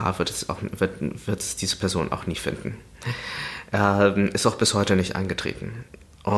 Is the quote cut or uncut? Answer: uncut